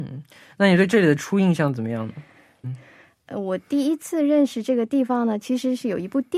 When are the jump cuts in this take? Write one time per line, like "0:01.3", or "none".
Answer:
0:02.6